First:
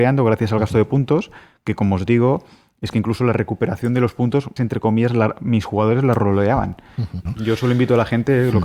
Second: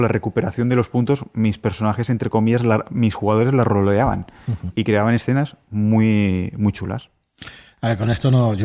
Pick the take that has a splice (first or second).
first